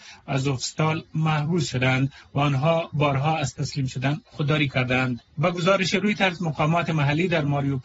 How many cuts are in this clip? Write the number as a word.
one